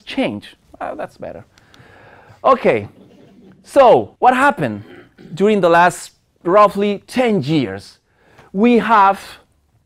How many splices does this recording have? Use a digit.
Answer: 1